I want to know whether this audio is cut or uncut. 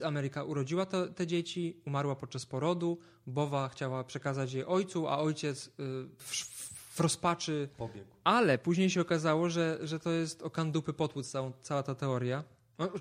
cut